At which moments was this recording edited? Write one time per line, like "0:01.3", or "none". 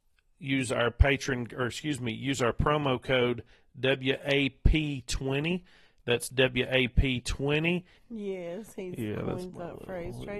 0:08.0